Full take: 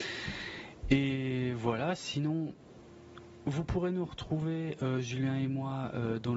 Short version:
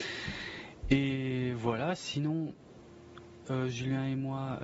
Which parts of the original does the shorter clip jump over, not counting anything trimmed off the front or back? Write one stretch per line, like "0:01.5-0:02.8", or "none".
0:03.4-0:04.8